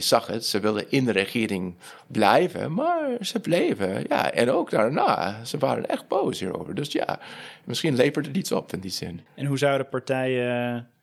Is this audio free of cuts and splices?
no; 1 cut; at 9.3 s

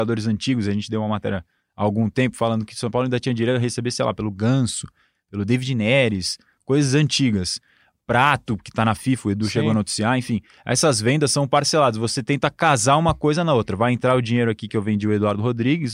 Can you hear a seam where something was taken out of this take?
no; 0 cuts

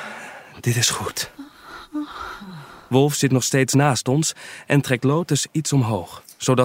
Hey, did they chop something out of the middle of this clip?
no; 0 cuts

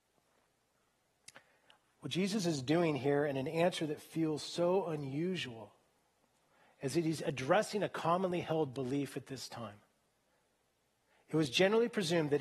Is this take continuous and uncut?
yes; 0 cuts

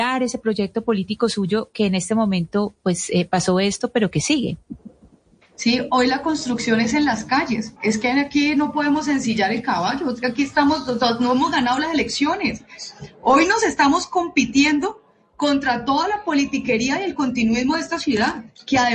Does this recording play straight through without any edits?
yes; 0 cuts

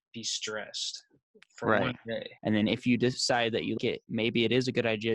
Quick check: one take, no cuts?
no; 2 cuts; at 2.4 s, 3.8 s

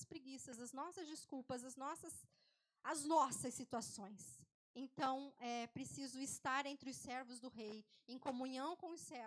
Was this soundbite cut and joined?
no; 0 cuts

